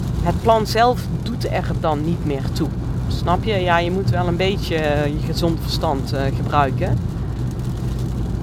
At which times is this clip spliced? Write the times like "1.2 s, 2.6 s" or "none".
none